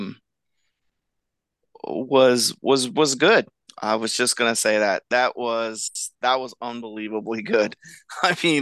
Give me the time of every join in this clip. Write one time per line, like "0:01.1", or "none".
0:03.7

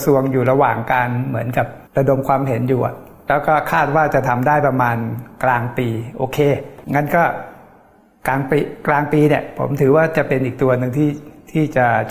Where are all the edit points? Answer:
0:01.9
0:06.8

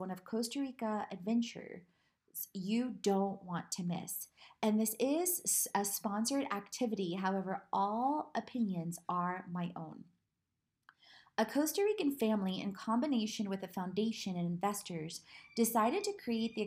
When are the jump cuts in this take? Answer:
none

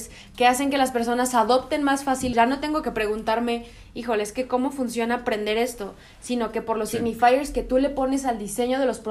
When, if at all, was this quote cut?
0:02.3

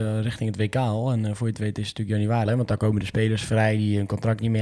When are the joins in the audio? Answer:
0:02.5

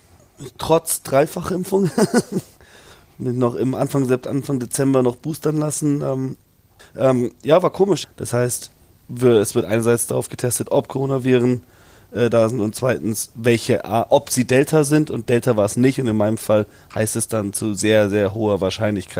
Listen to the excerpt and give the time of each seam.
0:06.8
0:08.0

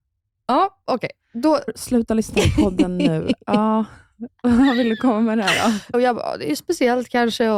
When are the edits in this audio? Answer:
0:01.7
0:05.9

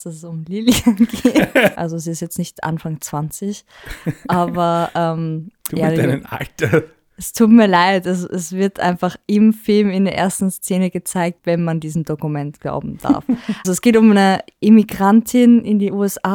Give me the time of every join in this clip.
0:01.8
0:11.4
0:13.6

